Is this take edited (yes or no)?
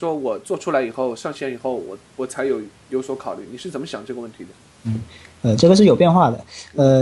no